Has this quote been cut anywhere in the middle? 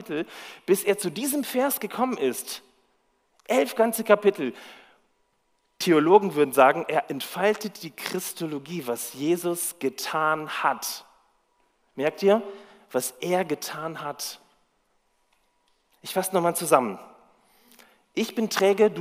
no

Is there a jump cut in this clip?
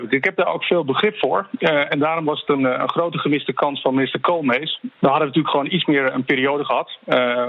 yes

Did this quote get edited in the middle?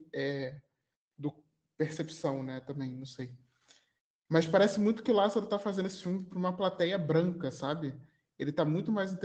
no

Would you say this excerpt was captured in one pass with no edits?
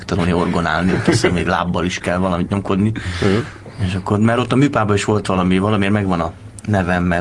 yes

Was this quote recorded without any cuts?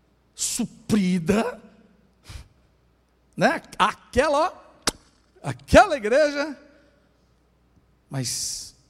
yes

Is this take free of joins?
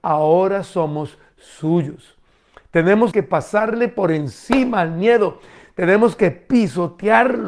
no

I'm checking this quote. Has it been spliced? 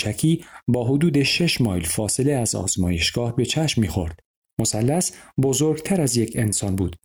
yes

